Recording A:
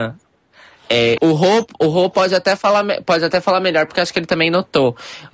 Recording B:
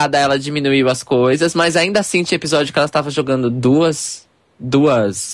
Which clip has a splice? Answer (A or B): A